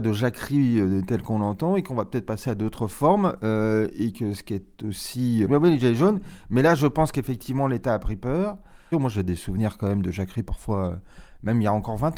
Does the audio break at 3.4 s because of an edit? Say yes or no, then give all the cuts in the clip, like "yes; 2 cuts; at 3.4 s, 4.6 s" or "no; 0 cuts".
no; 2 cuts; at 5.5 s, 8.9 s